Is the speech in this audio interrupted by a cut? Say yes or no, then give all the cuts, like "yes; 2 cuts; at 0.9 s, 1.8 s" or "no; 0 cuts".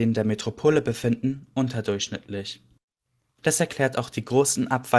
yes; 1 cut; at 3.4 s